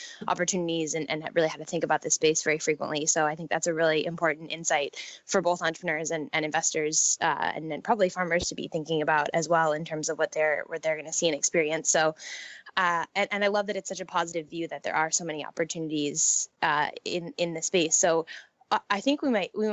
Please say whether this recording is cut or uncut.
uncut